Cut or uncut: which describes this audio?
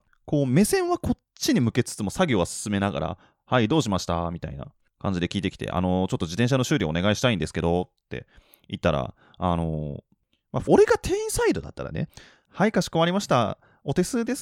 cut